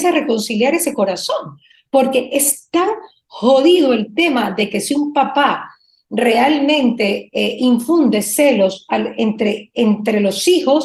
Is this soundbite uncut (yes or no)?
yes